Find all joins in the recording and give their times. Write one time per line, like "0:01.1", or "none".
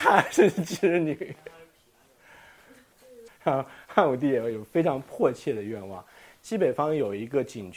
0:03.3
0:06.4